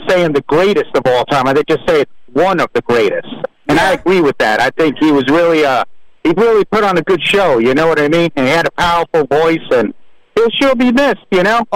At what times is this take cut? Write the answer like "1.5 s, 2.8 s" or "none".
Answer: none